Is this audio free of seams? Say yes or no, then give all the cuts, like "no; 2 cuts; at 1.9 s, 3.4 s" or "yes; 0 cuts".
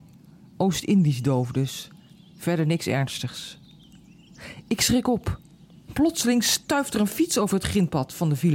yes; 0 cuts